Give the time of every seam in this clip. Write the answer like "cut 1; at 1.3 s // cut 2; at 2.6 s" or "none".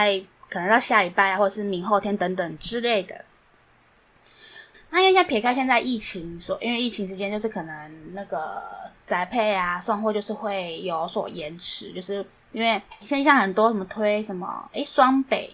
cut 1; at 4.7 s // cut 2; at 13.0 s